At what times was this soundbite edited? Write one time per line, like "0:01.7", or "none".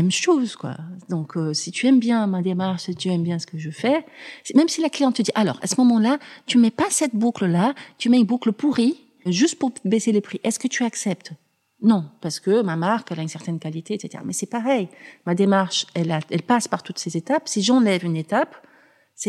0:09.3

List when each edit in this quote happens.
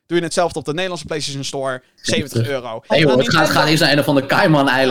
0:02.9

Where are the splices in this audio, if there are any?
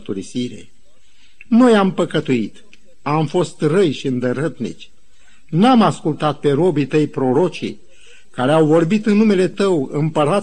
none

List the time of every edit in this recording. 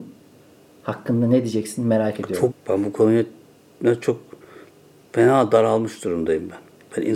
0:02.5

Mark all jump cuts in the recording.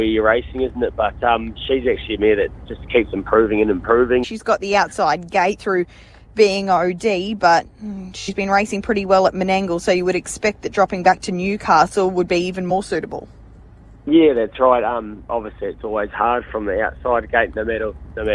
0:04.2

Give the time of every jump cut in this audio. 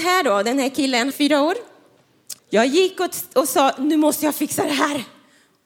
0:01.1
0:02.4

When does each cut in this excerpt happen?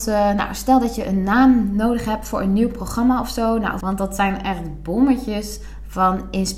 0:03.8

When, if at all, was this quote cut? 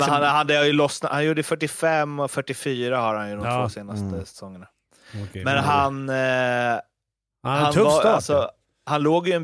none

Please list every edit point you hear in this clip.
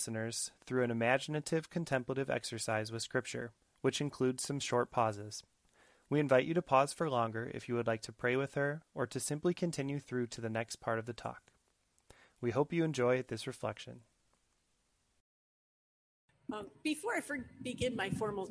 none

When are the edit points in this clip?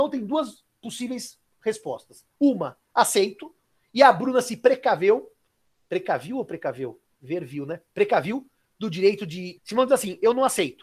0:09.6

